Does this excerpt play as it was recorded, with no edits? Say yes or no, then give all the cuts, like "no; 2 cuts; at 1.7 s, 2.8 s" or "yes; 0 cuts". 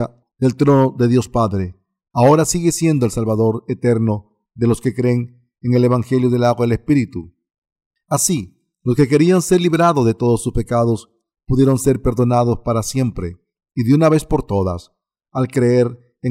yes; 0 cuts